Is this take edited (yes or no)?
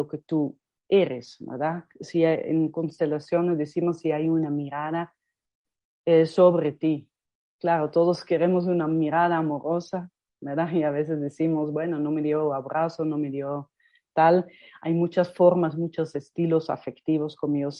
no